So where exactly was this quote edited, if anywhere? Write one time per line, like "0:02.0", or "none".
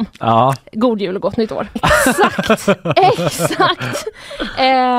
0:01.8